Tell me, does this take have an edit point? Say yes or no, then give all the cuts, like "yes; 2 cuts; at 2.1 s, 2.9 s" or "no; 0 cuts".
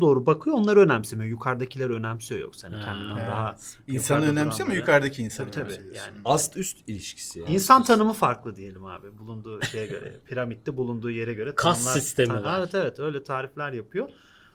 no; 0 cuts